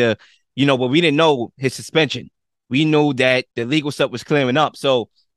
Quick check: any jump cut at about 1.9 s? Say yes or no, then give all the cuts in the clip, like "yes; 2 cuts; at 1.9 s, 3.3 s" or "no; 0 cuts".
no; 1 cut; at 3.5 s